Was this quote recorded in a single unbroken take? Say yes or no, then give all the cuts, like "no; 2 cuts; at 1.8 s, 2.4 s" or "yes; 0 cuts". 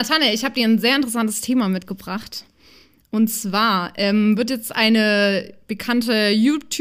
yes; 0 cuts